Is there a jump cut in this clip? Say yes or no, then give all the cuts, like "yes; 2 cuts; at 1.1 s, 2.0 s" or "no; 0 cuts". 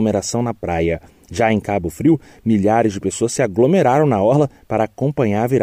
no; 0 cuts